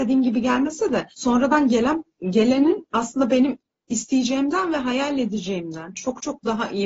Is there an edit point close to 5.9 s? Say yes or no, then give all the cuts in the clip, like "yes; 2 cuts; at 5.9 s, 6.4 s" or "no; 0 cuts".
no; 1 cut; at 1.1 s